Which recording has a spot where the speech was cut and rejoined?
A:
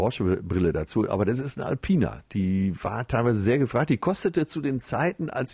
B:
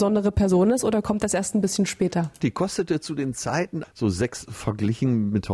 B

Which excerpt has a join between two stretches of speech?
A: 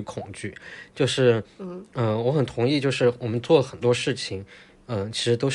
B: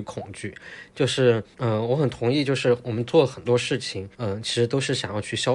B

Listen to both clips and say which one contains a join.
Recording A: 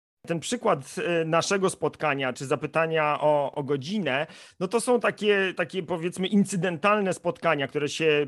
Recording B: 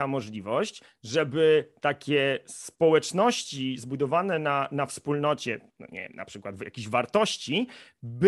A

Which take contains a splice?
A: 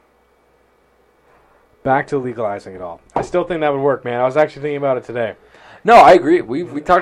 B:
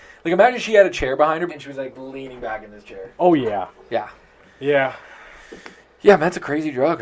B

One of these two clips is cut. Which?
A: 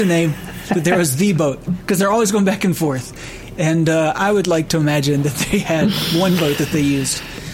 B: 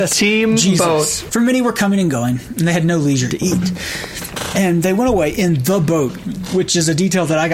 B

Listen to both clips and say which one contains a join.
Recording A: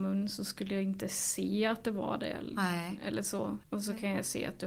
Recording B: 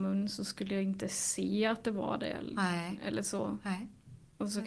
A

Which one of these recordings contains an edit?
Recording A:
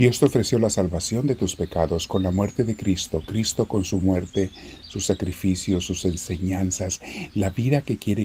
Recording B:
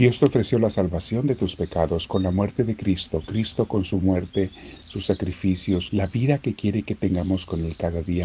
B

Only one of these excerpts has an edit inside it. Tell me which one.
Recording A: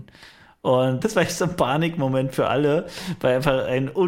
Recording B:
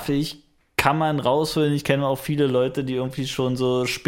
A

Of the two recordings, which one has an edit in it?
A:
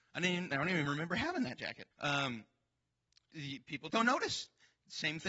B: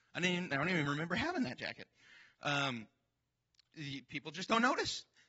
A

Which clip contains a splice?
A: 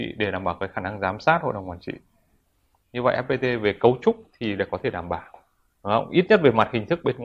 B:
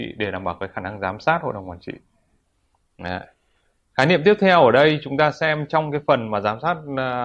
A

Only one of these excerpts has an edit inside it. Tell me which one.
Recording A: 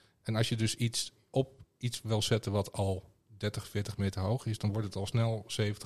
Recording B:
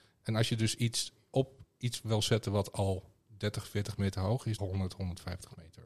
B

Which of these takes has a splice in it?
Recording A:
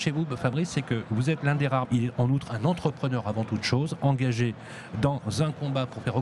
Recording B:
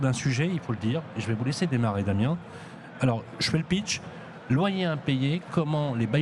A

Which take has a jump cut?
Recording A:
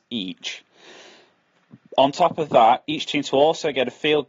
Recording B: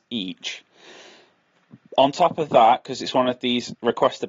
A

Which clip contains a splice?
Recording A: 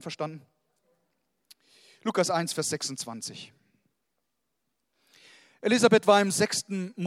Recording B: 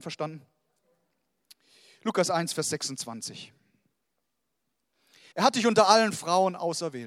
B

